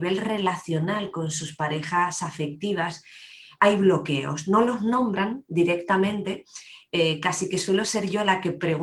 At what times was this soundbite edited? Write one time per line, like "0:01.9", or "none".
none